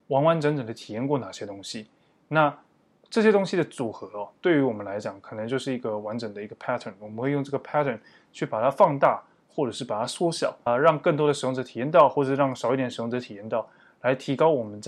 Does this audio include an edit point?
yes; 1 cut; at 10.7 s

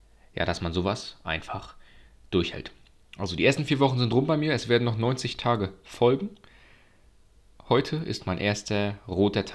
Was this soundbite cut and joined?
no; 0 cuts

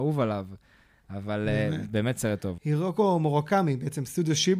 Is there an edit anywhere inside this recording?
yes; 1 cut; at 2.6 s

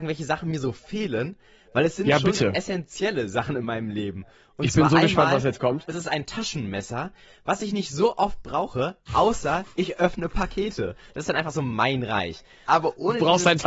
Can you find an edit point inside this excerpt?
yes; 2 cuts; at 11.1 s, 12.6 s

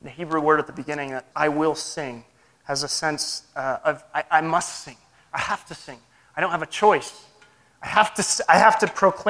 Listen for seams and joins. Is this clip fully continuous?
no; 1 cut; at 1.3 s

